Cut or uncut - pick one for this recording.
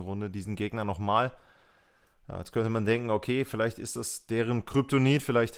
uncut